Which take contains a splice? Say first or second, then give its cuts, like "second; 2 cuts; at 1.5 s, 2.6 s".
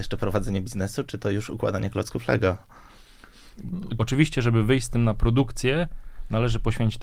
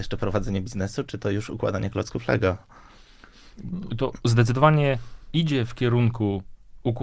first; 1 cut; at 4.0 s